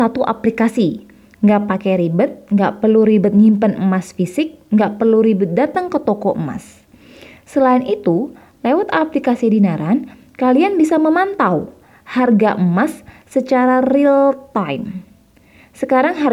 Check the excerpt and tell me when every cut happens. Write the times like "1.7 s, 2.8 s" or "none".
none